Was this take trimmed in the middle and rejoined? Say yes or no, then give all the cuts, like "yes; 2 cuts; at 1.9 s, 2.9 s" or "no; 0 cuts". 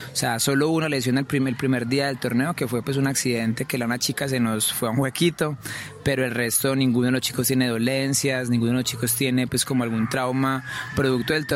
no; 0 cuts